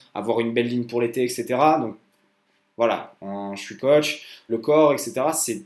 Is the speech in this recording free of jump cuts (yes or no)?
no